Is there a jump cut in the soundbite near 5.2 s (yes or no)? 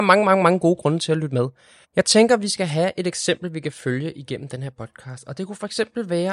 no